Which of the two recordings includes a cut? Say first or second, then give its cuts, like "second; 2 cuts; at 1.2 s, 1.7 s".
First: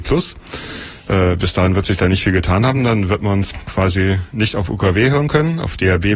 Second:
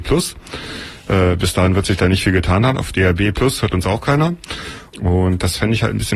second; 2 cuts; at 2.7 s, 4.9 s